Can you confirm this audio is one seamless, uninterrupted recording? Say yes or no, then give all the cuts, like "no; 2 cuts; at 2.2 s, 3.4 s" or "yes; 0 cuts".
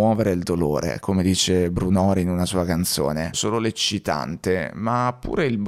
no; 1 cut; at 3.3 s